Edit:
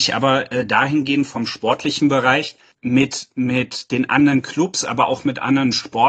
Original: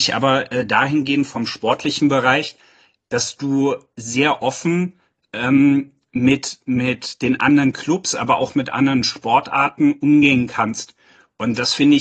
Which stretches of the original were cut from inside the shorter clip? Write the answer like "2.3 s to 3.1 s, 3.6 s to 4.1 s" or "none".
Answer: 2.7 s to 6.0 s